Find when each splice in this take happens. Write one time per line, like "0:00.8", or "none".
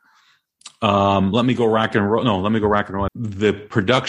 0:03.1